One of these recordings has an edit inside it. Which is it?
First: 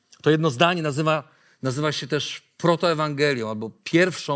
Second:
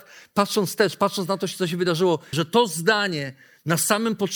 second; 1 cut; at 2.3 s

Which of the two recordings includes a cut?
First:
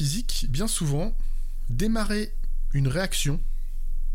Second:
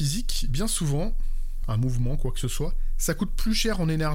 second; 1 cut; at 1.6 s

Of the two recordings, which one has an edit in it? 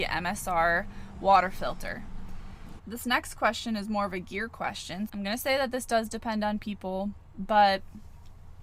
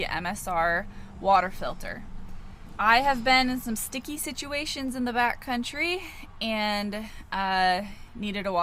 first; 2 cuts; at 2.8 s, 5.1 s

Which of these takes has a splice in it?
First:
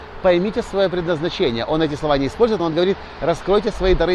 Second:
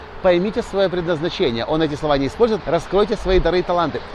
second; 1 cut; at 2.6 s

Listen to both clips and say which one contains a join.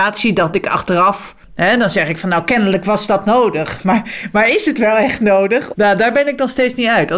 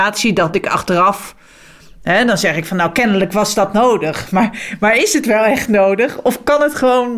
first; 2 cuts; at 1.4 s, 5.7 s

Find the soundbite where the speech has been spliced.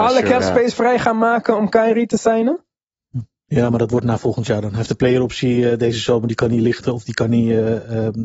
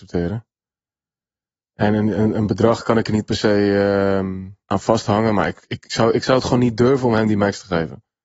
second; 1 cut; at 4.6 s

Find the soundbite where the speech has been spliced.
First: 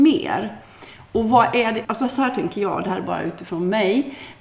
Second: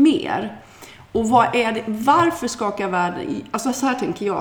first; 1 cut; at 1.8 s

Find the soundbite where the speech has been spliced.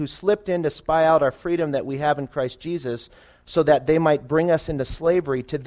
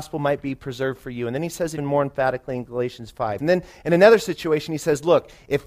second; 2 cuts; at 1.8 s, 3.4 s

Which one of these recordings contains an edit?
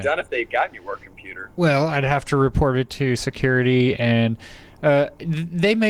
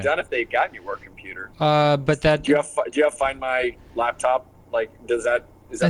second; 1 cut; at 1.5 s

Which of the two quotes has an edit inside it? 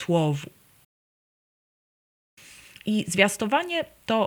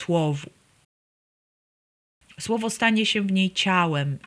second; 1 cut; at 2.2 s

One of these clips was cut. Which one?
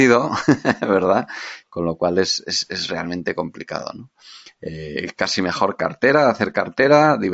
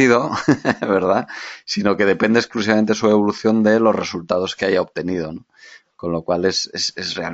first; 1 cut; at 1.6 s

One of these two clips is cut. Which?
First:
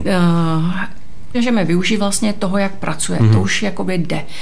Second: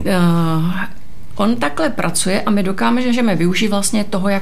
first; 1 cut; at 1.3 s

